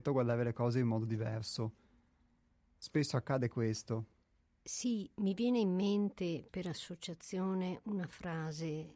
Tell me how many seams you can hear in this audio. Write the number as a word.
zero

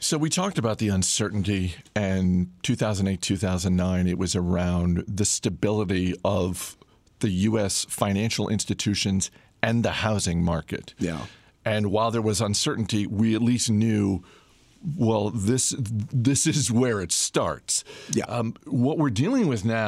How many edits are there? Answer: zero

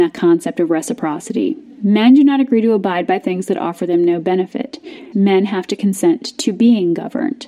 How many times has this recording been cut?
one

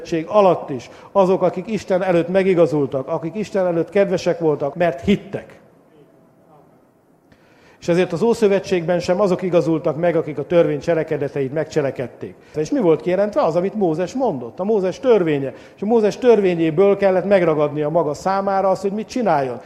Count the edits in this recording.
two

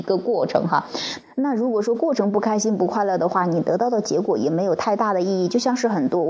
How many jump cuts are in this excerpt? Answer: one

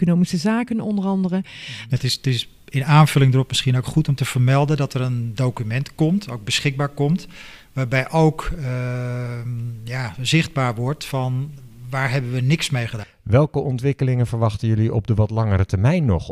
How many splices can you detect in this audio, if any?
two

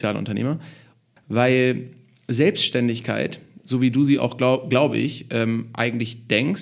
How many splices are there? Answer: one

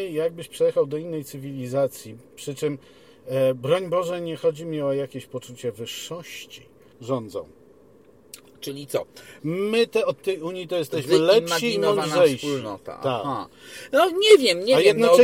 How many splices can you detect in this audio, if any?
two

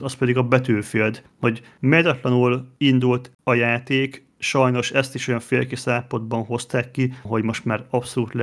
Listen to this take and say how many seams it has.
one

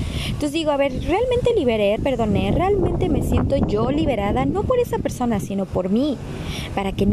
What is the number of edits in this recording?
one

